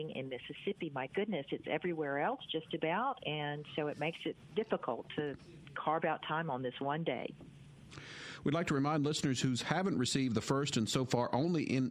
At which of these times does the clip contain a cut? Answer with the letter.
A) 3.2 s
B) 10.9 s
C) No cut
C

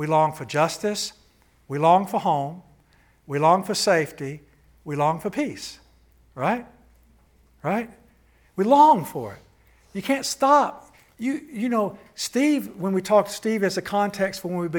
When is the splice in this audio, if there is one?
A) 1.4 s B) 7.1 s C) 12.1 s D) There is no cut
D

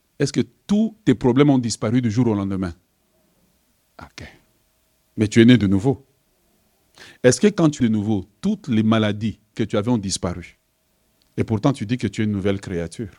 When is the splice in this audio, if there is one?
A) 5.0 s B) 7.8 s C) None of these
B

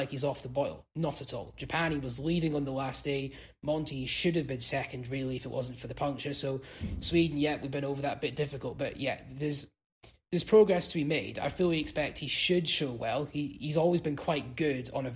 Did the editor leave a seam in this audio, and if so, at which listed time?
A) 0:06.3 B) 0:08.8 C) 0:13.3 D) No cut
D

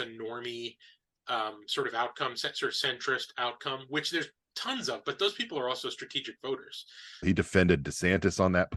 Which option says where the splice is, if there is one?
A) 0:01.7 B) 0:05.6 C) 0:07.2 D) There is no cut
C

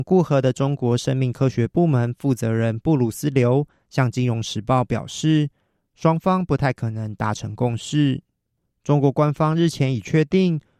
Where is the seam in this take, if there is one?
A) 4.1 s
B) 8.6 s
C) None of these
B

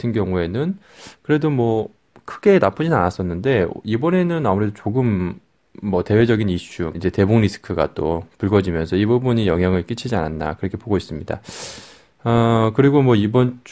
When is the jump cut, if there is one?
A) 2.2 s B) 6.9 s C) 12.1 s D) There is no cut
B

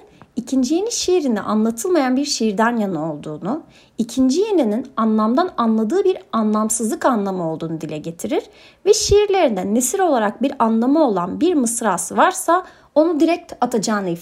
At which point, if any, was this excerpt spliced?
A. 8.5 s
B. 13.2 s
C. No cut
C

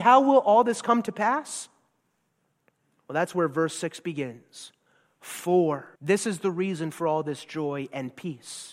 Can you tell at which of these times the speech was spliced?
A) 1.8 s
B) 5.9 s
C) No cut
B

